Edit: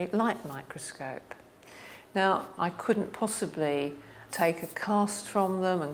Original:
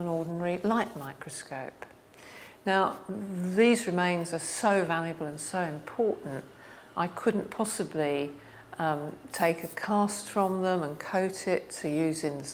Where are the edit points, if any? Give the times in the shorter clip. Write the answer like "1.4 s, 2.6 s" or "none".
2.6 s, 4.3 s